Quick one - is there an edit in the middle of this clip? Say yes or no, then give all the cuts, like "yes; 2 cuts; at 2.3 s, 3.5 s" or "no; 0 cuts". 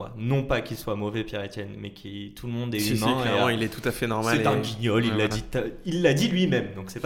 no; 0 cuts